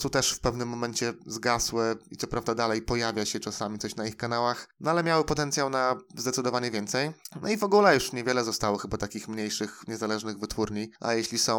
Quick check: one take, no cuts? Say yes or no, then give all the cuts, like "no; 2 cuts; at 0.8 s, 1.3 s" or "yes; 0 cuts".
yes; 0 cuts